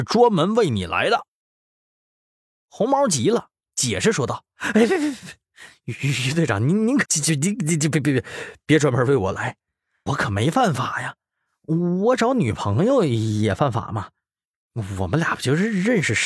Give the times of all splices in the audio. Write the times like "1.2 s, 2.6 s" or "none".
7.0 s, 10.1 s